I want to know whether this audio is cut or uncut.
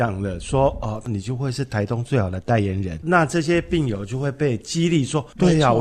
uncut